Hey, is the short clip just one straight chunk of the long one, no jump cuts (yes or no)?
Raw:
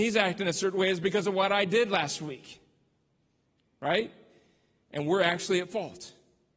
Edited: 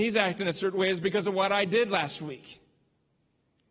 yes